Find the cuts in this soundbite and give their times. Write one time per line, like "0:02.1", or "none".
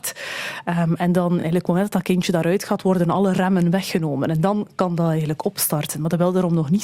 none